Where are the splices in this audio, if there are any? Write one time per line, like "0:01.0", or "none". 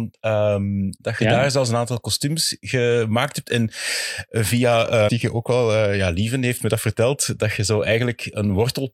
0:01.0
0:05.1

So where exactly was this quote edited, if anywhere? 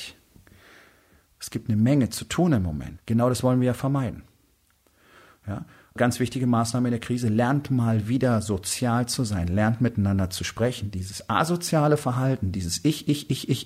0:03.0
0:06.0

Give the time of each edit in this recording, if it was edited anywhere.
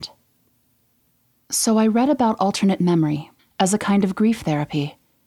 0:03.4

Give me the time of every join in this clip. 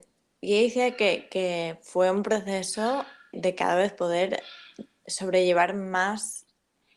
0:03.3

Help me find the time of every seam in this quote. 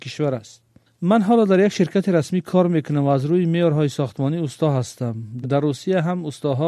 0:05.4

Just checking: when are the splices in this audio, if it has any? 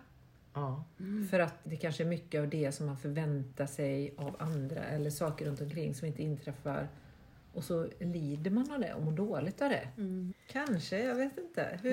0:01.6
0:10.3

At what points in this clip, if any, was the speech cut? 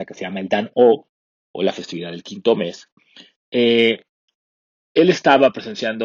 none

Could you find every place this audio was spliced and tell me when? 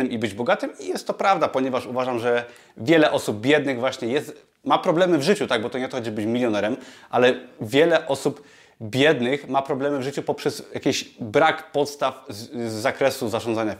none

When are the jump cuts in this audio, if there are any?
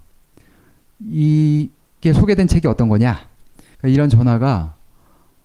0:03.7

